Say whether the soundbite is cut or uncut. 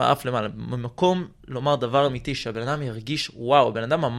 uncut